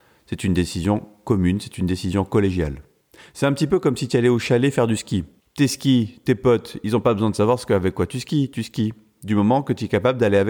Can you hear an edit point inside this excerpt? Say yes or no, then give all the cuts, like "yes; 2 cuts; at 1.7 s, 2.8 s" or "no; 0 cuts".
no; 0 cuts